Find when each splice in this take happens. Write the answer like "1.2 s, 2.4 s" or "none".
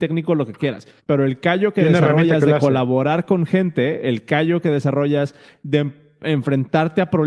1.0 s